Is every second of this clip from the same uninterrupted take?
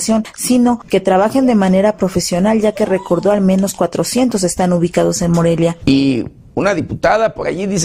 no; 1 cut; at 5.8 s

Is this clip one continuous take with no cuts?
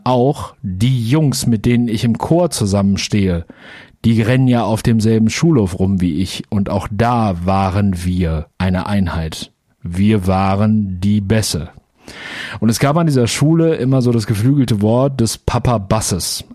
no; 1 cut; at 8.5 s

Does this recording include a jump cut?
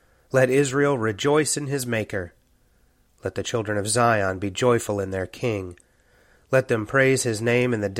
no; 0 cuts

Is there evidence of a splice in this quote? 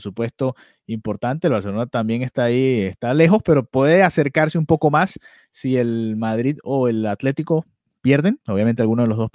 no; 0 cuts

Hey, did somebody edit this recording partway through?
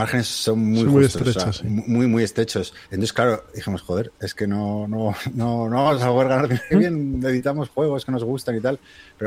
yes; 2 cuts; at 2.8 s, 6.7 s

